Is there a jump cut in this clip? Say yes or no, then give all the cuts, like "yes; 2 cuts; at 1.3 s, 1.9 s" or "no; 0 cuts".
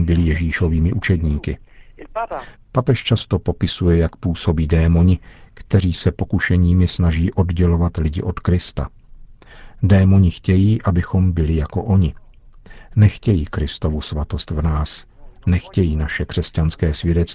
yes; 1 cut; at 2.5 s